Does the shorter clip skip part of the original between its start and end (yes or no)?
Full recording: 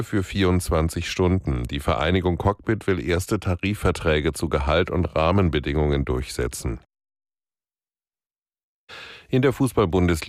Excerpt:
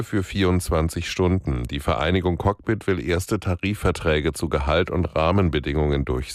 no